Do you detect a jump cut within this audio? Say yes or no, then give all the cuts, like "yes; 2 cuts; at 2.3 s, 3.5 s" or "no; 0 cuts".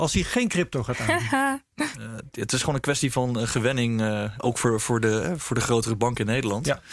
yes; 2 cuts; at 1.9 s, 4.4 s